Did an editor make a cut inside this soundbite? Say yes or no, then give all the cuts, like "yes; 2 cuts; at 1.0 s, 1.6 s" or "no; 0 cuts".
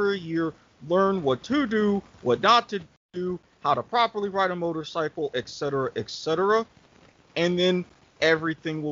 no; 0 cuts